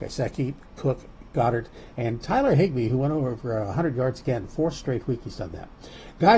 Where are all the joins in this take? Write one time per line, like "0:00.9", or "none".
none